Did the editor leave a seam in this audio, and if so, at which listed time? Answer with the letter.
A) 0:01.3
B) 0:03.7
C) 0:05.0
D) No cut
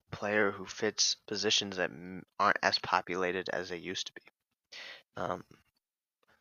C